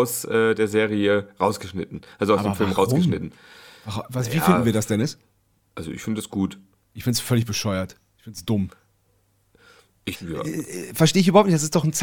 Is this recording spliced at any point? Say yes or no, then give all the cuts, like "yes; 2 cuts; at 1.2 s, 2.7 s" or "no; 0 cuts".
yes; 1 cut; at 10.1 s